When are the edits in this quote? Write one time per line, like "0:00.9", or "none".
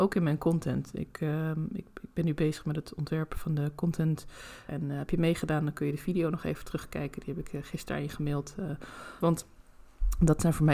0:04.7
0:09.2